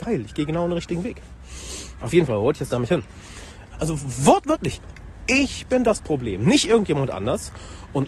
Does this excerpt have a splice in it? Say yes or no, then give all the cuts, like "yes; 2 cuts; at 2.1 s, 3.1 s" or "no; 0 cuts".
yes; 2 cuts; at 2.0 s, 3.7 s